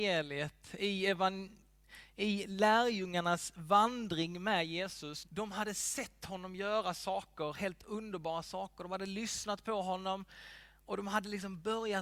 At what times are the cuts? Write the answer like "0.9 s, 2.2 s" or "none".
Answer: 5.2 s